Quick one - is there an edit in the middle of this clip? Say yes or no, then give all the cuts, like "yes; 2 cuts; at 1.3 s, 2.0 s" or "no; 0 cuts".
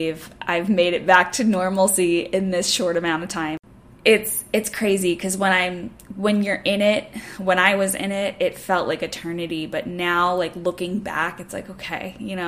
no; 0 cuts